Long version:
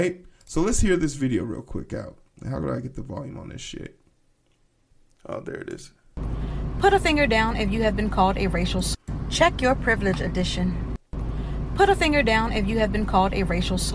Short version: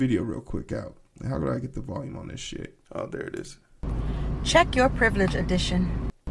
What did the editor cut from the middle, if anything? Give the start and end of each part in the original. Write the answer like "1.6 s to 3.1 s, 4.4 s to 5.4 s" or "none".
4.1 s to 5.2 s, 6.7 s to 9.2 s